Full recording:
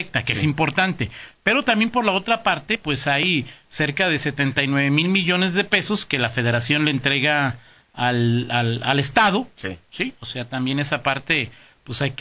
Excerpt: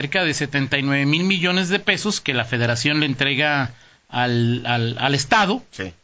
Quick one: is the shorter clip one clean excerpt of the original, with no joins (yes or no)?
yes